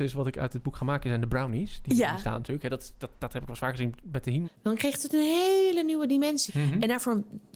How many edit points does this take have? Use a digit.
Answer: 3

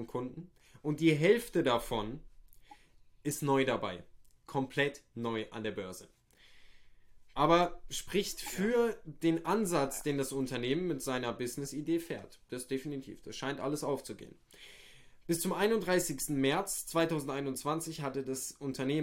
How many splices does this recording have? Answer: 1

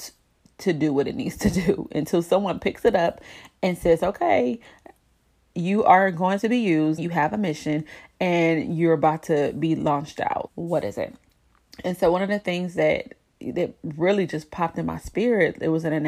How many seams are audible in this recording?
2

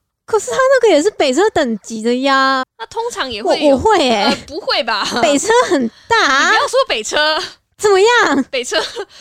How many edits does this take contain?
1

